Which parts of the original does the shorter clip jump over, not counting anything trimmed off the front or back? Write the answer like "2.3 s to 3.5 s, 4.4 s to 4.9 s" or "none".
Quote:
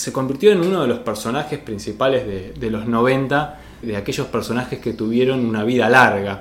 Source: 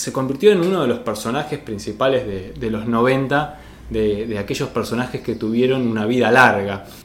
3.8 s to 4.2 s